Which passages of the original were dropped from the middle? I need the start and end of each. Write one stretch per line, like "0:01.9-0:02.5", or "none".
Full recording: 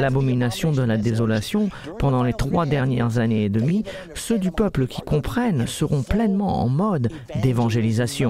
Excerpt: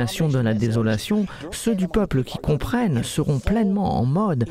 0:01.9-0:04.1